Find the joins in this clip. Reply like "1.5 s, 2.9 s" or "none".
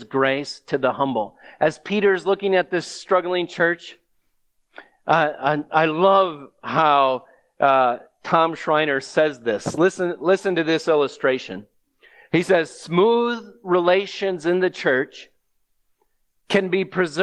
none

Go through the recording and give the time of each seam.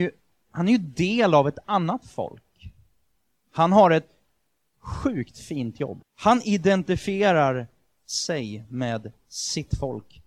6.0 s

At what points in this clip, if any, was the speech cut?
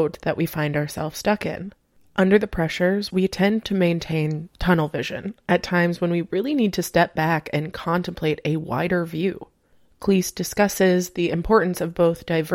3.1 s

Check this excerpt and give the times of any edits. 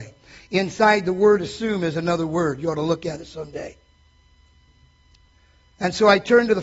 none

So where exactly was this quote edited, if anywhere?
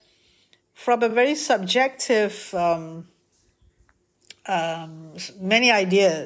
none

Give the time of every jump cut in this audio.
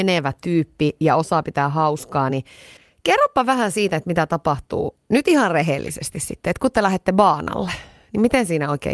none

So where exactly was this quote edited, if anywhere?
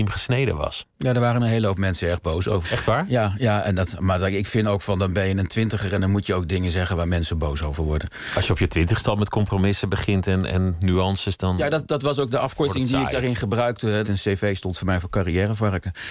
2.6 s, 14.0 s

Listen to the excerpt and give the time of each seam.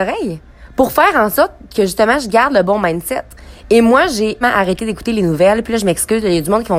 4.4 s

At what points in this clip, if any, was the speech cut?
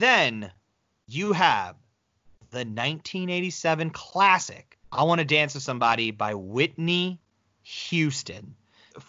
4.8 s

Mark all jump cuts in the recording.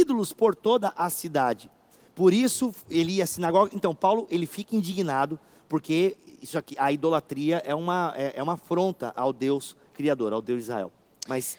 none

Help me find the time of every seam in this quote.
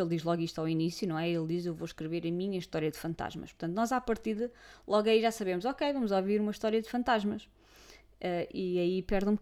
none

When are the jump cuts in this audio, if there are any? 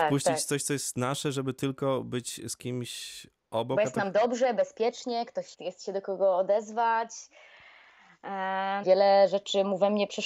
5.5 s, 8.8 s

